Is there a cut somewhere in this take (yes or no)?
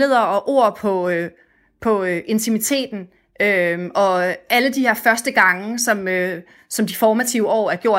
no